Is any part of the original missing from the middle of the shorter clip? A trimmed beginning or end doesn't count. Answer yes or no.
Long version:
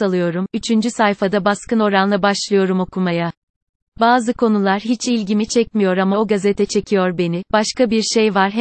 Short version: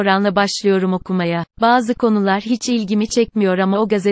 yes